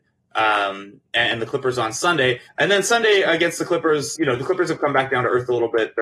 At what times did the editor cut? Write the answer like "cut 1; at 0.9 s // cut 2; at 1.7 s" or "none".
cut 1; at 2.5 s // cut 2; at 4.2 s